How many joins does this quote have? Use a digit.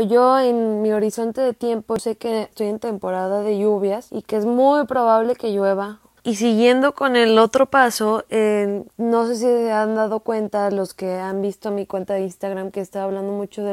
1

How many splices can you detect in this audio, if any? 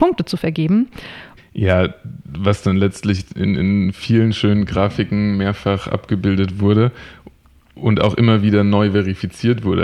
1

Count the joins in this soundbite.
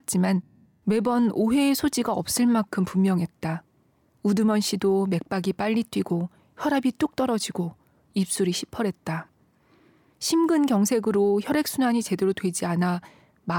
0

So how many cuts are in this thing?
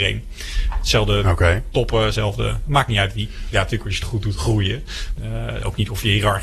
3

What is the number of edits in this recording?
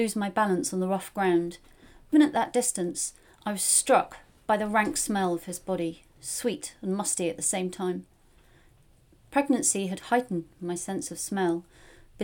1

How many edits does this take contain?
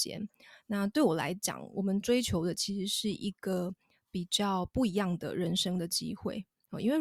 0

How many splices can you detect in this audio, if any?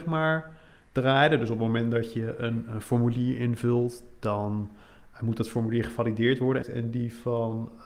1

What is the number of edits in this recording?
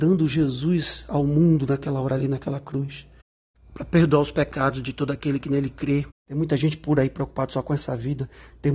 1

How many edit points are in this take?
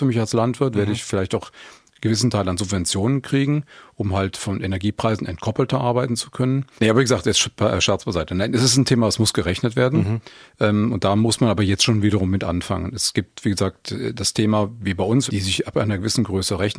2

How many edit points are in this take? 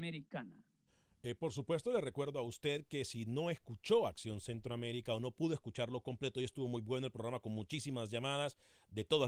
0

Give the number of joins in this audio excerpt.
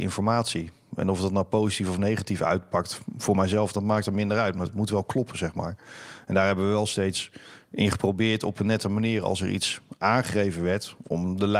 0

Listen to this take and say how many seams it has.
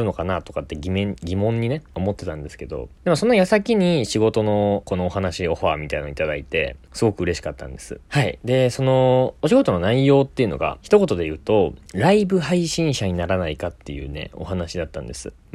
1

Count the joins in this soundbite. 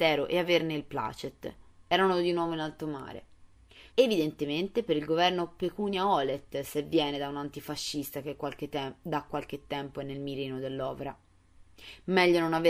2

